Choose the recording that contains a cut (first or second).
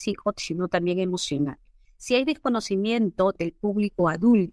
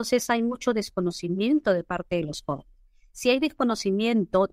first